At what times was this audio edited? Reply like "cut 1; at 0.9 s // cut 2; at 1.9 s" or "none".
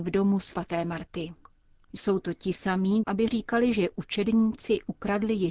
cut 1; at 1.8 s // cut 2; at 3.0 s